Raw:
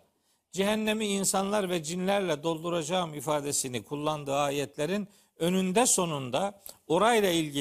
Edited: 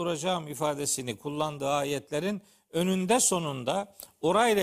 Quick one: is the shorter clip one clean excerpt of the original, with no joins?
yes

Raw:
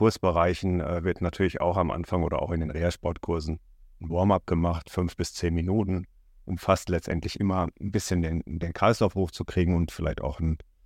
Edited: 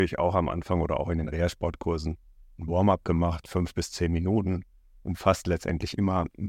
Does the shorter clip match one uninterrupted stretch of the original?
yes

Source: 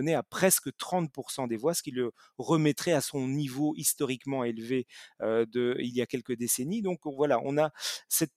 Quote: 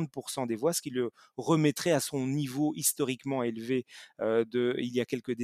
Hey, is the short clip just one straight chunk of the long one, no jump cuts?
yes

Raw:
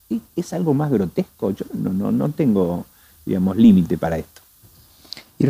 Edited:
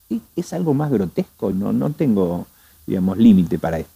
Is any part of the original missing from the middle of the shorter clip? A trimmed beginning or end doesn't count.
yes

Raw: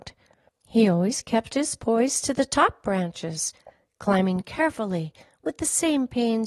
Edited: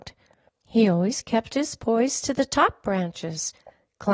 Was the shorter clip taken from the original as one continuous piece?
yes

